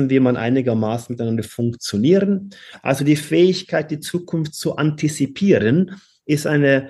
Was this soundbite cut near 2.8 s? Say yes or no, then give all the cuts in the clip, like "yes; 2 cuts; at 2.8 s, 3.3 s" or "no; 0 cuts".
yes; 1 cut; at 2.8 s